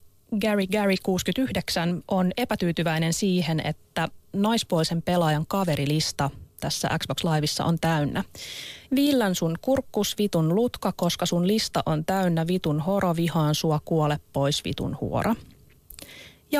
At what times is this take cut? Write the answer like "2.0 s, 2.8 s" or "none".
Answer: 8.8 s